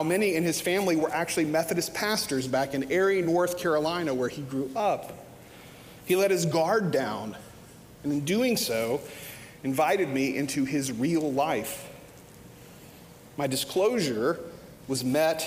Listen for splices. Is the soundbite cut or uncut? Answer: uncut